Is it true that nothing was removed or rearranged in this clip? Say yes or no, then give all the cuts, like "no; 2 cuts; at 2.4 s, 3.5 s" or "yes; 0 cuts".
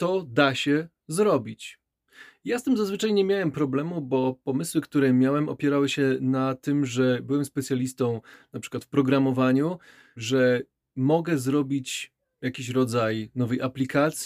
no; 1 cut; at 10.2 s